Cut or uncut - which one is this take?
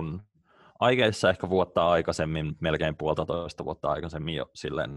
uncut